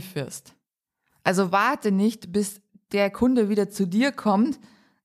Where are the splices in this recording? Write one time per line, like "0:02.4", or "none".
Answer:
none

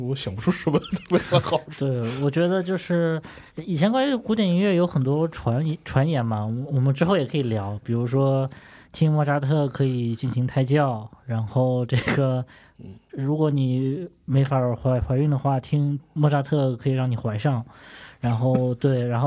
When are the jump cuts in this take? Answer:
0:03.5

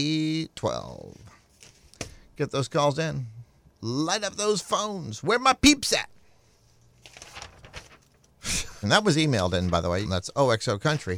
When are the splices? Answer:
0:08.8
0:10.0

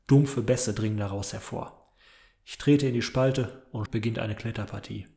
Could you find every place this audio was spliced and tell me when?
0:03.9

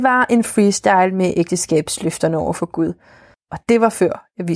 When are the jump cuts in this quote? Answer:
0:03.3

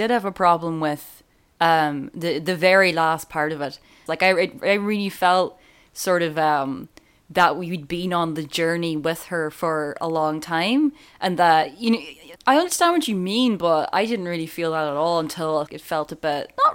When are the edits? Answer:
0:04.1
0:12.4
0:15.7

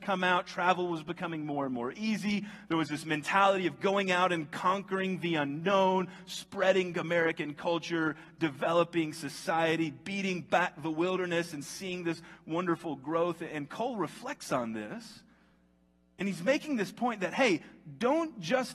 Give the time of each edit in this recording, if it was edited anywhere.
none

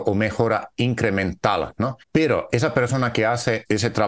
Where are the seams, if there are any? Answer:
0:02.0

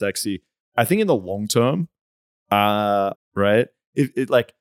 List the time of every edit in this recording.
0:03.1

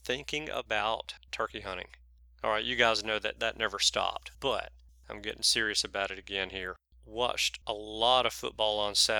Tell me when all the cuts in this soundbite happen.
0:06.9

